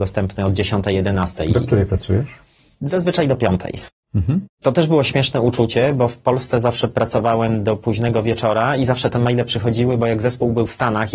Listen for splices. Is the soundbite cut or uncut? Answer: uncut